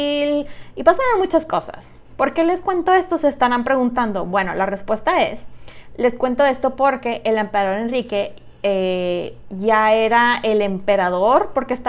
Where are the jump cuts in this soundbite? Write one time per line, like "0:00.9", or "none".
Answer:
none